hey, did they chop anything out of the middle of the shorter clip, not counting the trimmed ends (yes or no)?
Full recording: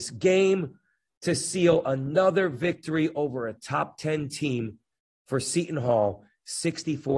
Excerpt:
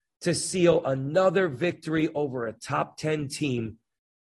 no